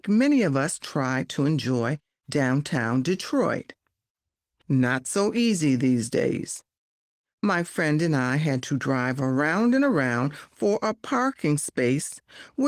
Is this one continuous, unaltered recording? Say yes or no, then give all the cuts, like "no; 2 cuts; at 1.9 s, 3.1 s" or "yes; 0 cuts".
yes; 0 cuts